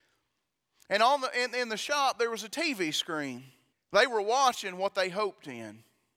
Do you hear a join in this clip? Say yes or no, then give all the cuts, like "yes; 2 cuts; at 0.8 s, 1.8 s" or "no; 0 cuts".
yes; 1 cut; at 3.7 s